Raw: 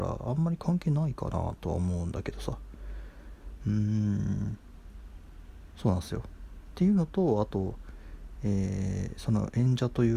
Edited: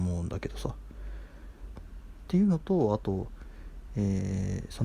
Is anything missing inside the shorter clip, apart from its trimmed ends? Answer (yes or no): yes